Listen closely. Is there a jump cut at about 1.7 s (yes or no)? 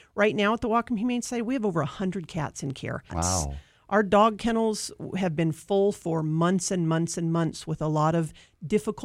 no